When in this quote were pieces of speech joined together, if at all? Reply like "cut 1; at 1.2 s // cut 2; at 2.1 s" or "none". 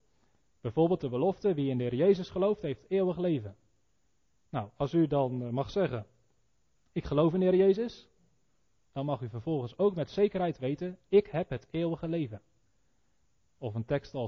none